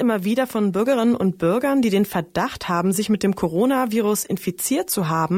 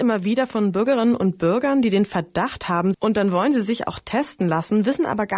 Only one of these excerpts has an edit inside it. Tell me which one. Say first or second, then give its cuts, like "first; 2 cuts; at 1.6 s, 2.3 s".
second; 1 cut; at 2.9 s